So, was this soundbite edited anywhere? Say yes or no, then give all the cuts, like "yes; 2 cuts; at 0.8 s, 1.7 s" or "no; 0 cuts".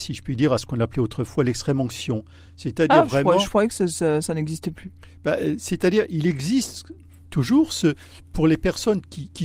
no; 0 cuts